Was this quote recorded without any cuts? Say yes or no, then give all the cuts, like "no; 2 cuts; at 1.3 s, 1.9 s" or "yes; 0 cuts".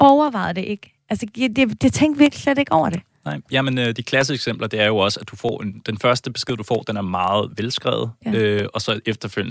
yes; 0 cuts